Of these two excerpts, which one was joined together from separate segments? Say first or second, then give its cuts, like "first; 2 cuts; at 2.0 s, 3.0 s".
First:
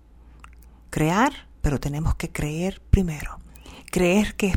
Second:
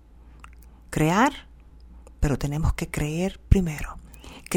first; 1 cut; at 1.5 s